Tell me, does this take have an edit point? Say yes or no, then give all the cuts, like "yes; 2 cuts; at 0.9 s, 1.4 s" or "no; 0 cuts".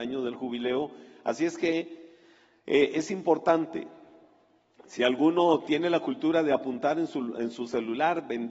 no; 0 cuts